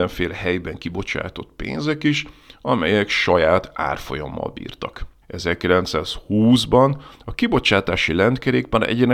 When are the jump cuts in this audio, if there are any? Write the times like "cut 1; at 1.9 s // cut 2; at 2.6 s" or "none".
cut 1; at 5.2 s